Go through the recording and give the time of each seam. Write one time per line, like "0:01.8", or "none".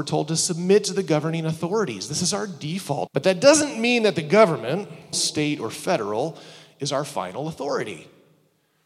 0:03.1
0:05.1